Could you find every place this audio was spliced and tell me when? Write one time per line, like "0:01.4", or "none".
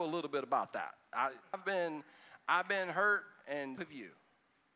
0:01.5
0:03.8